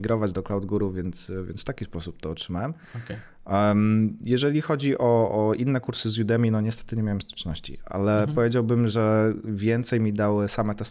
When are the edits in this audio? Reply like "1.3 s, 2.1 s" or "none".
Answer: none